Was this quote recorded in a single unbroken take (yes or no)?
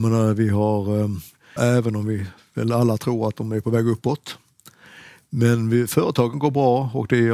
no